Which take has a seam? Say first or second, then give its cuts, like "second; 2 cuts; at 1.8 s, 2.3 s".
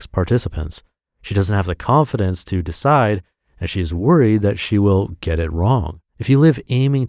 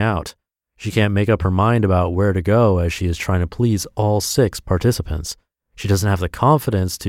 first; 1 cut; at 6.1 s